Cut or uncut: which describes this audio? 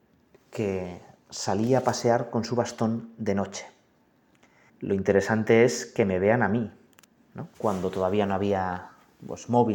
cut